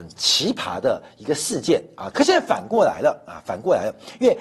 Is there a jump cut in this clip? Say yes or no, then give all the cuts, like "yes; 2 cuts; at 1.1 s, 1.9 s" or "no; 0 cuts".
yes; 1 cut; at 2.1 s